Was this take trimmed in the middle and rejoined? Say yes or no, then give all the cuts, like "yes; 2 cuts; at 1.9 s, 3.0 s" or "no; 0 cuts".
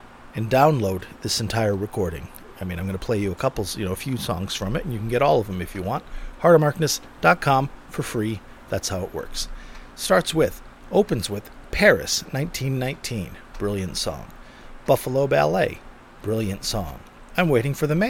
no; 0 cuts